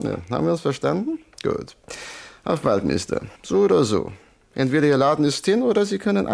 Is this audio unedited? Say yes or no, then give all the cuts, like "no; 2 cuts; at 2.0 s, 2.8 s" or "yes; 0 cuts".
no; 1 cut; at 3.3 s